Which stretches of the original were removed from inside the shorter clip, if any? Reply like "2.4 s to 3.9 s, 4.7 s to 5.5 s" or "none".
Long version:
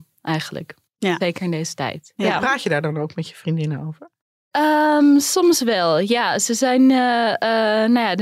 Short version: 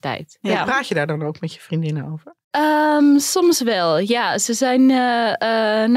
4.2 s to 4.4 s